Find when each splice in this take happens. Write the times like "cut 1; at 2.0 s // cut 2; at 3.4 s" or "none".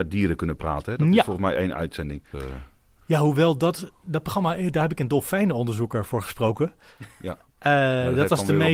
cut 1; at 2.3 s